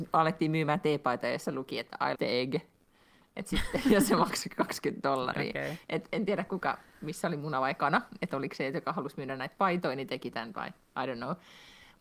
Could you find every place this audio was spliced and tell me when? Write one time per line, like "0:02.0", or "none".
0:02.2